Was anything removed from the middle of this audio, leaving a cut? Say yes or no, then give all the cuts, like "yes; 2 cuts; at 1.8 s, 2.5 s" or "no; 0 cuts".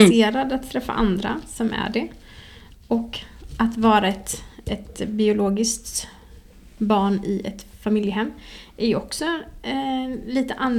no; 0 cuts